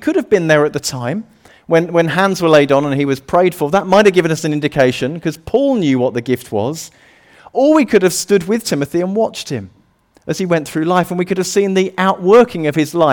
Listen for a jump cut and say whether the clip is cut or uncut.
uncut